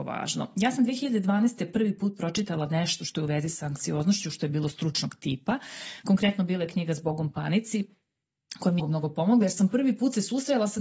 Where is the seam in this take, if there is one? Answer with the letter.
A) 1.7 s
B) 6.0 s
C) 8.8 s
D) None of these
C